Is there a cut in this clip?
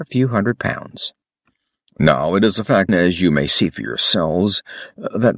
yes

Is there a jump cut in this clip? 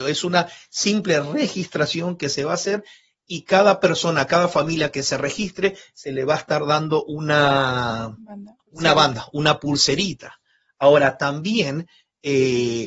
no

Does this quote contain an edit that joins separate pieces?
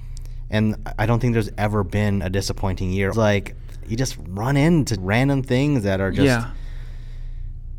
yes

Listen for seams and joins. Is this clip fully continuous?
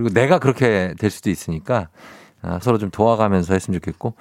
no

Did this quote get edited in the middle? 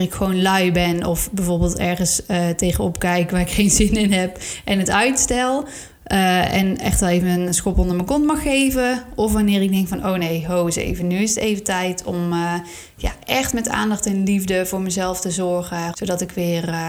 yes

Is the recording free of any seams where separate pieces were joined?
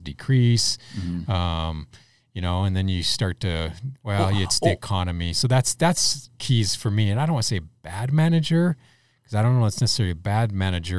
yes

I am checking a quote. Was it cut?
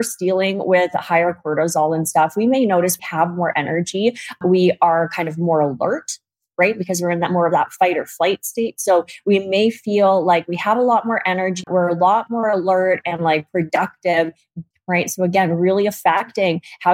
yes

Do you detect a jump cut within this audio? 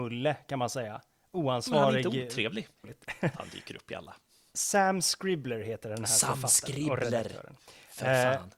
yes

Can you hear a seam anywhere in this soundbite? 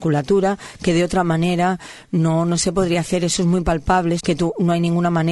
yes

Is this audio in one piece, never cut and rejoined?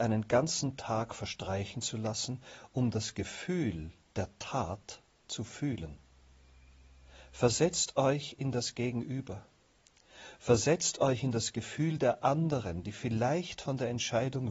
yes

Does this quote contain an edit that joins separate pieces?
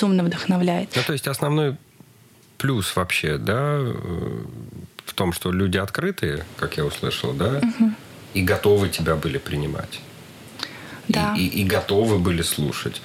no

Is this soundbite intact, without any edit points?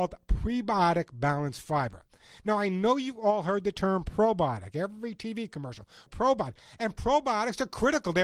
no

